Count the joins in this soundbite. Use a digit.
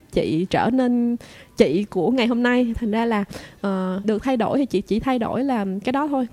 1